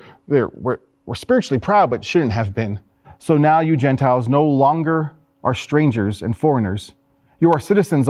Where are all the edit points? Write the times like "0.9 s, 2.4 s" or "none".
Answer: 3.0 s